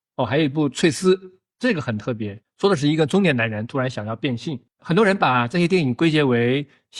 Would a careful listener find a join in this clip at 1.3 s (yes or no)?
no